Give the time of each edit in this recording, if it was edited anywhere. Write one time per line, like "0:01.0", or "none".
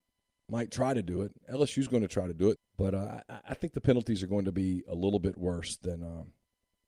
0:02.6